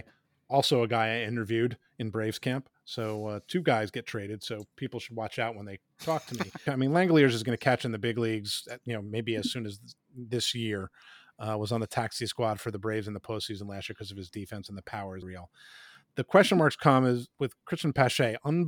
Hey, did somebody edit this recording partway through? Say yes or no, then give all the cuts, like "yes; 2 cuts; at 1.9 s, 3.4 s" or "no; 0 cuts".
yes; 2 cuts; at 6.7 s, 15.2 s